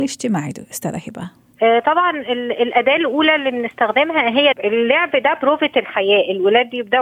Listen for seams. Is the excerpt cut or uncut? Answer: cut